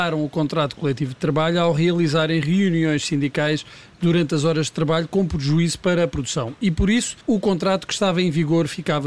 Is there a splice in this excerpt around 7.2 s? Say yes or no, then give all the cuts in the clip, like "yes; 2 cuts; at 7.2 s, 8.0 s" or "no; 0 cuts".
yes; 1 cut; at 7.2 s